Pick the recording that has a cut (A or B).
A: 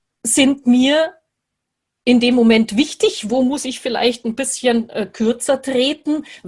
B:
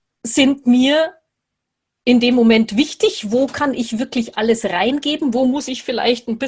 A